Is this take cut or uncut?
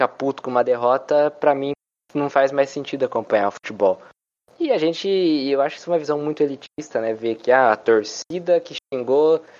uncut